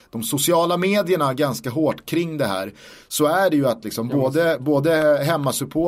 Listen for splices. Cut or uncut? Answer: uncut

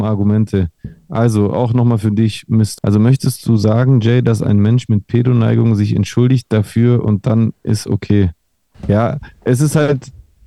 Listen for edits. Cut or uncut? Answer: cut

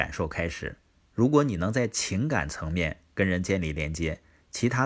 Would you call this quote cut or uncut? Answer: uncut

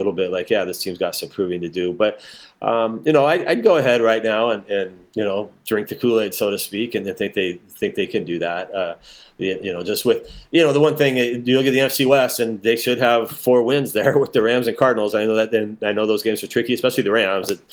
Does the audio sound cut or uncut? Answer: uncut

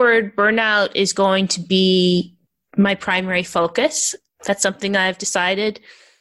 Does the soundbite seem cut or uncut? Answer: uncut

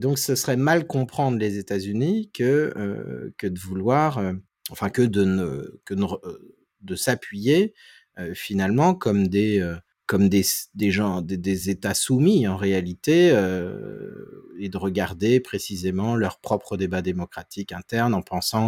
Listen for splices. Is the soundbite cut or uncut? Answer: uncut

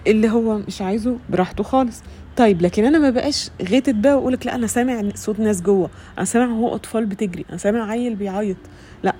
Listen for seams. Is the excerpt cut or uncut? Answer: uncut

